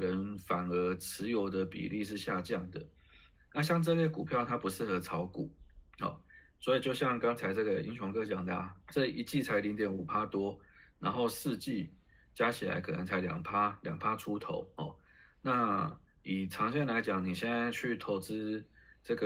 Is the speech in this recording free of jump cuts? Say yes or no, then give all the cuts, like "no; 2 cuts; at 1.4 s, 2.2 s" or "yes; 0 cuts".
no; 1 cut; at 8.8 s